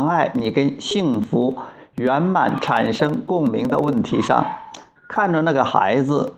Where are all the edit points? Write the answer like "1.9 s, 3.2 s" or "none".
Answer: 5.0 s